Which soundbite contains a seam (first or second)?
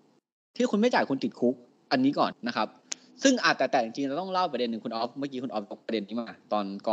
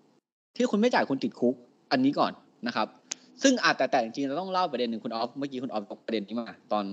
first